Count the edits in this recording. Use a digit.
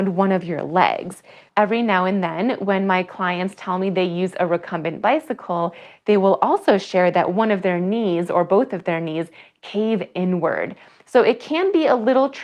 1